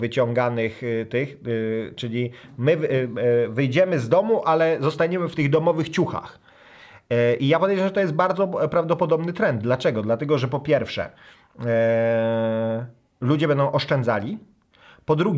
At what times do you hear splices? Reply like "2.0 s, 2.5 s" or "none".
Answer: none